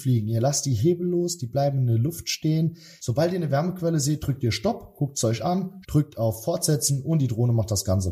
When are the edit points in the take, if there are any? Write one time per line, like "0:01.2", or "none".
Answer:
0:03.0
0:05.8